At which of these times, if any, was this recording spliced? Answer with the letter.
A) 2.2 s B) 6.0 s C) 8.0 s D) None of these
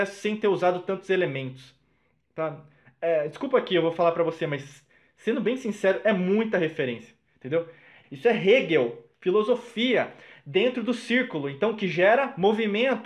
C